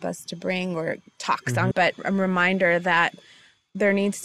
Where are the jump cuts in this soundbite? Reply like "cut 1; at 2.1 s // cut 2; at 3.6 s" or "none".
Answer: cut 1; at 1.7 s